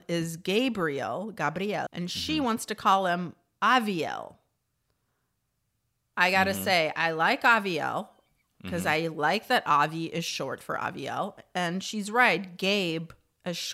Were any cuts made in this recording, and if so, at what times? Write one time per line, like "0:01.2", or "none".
0:01.9